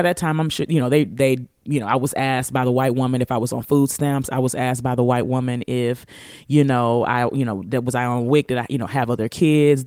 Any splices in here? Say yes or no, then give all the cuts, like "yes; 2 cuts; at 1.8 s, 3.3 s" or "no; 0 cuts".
no; 0 cuts